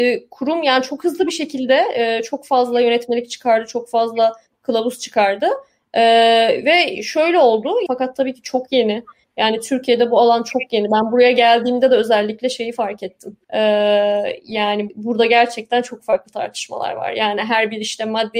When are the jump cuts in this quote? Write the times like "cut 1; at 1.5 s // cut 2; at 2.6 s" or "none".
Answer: cut 1; at 7.9 s // cut 2; at 13.4 s // cut 3; at 14.9 s

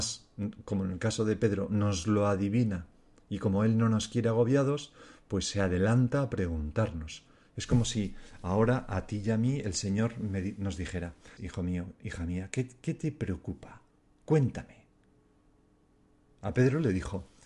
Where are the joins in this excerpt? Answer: cut 1; at 11.4 s

